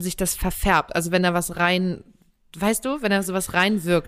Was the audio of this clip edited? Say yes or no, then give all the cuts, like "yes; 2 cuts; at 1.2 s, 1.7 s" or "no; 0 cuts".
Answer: no; 0 cuts